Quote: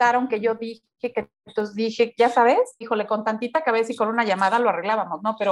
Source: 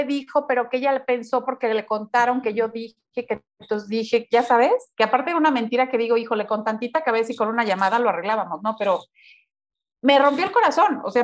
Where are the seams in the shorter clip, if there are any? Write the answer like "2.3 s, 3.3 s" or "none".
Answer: 2.8 s